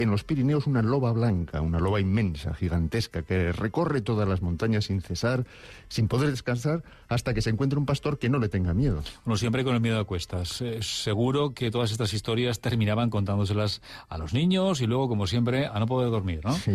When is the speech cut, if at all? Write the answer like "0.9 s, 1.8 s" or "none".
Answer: none